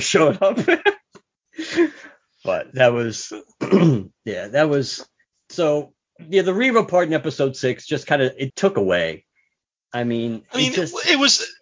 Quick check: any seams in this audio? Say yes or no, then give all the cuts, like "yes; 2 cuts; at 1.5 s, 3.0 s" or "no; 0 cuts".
yes; 1 cut; at 8.5 s